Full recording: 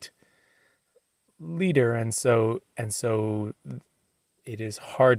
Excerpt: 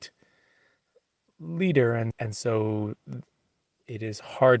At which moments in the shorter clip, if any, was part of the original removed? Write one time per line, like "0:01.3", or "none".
0:02.1